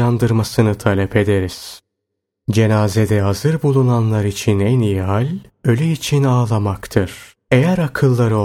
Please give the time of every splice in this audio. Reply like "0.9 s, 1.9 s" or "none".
none